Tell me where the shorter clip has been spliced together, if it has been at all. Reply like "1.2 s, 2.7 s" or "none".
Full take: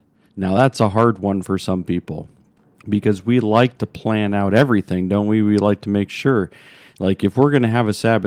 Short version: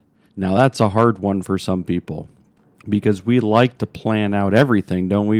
none